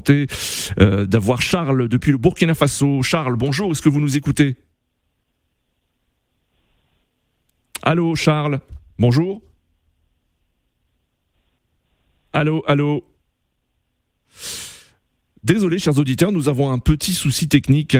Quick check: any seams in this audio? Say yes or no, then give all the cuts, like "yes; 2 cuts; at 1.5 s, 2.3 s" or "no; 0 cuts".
no; 0 cuts